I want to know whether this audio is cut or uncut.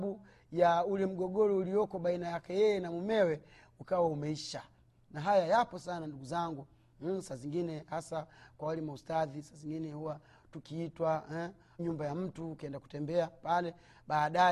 cut